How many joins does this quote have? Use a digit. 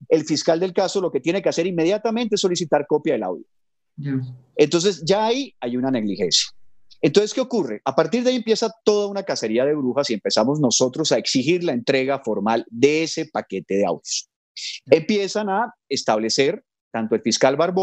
0